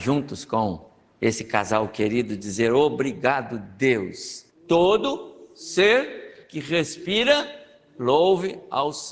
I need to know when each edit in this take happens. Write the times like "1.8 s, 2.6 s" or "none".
4.5 s